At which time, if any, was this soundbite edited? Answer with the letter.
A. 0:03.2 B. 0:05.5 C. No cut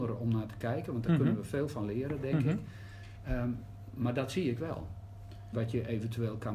B